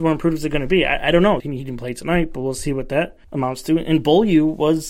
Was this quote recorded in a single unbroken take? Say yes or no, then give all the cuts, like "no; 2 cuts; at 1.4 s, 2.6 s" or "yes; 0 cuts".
no; 2 cuts; at 1.4 s, 3.2 s